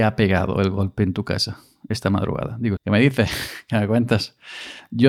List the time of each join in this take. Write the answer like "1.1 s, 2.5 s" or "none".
2.8 s

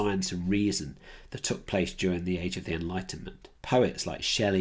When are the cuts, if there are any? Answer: 3.6 s

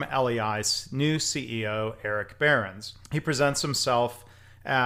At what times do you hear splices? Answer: 3.0 s

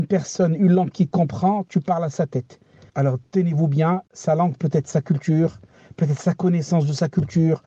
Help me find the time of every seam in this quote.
2.9 s

